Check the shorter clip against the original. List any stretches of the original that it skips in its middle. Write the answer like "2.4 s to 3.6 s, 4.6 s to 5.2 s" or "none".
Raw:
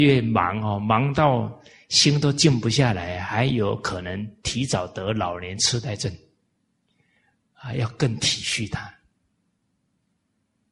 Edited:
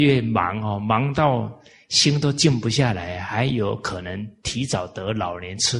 none